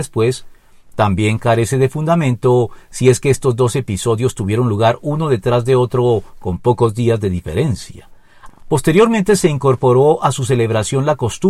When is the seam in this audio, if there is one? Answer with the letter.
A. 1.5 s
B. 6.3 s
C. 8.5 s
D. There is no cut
C